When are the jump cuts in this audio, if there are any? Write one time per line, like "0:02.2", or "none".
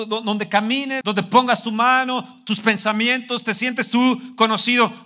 0:01.0